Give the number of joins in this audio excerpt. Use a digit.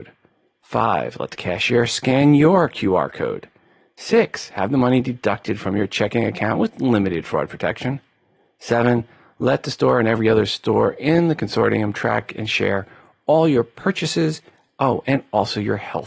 0